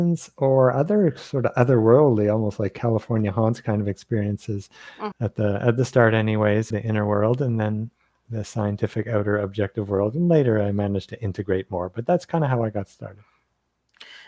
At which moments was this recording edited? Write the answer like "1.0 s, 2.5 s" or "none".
5.1 s, 6.7 s